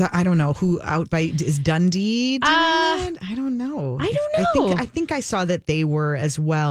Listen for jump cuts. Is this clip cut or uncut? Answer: uncut